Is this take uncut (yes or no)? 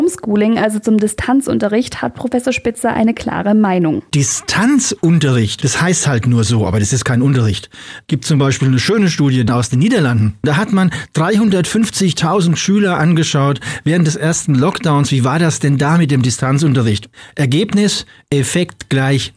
yes